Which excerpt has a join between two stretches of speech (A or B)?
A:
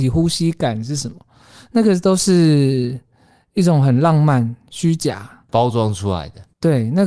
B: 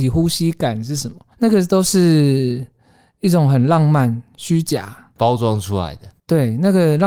B